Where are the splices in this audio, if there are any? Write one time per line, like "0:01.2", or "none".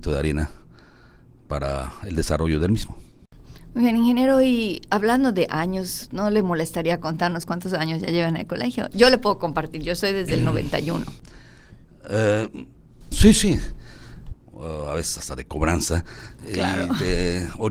0:13.1
0:14.3